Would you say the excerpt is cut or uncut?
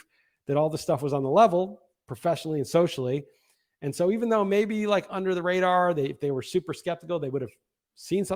uncut